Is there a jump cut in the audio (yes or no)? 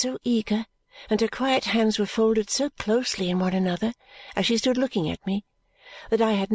no